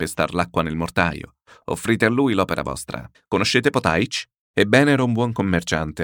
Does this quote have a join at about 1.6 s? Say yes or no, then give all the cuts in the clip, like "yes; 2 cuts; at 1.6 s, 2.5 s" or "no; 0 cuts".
no; 2 cuts; at 3.1 s, 4.5 s